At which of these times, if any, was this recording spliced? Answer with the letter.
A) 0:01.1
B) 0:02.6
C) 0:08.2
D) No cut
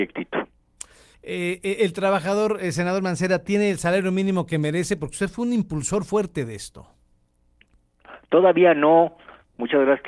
A